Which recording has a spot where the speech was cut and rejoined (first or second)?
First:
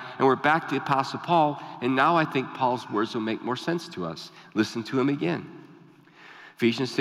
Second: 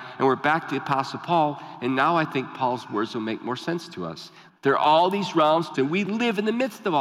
second